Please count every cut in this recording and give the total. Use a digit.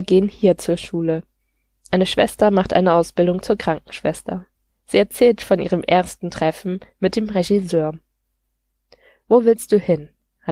1